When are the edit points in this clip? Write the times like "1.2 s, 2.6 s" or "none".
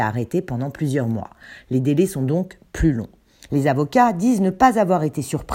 3.5 s